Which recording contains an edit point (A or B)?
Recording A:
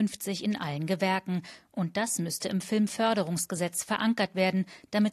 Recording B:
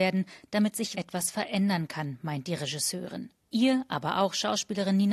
B